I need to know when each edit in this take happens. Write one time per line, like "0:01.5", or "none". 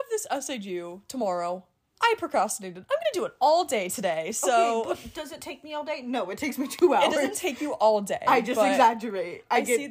none